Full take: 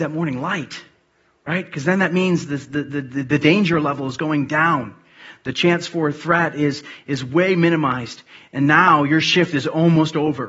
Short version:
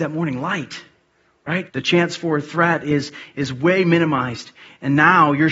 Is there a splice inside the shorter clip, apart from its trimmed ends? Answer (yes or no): yes